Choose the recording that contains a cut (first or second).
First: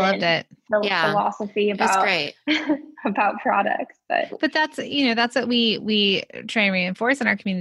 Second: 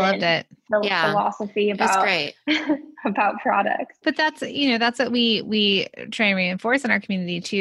second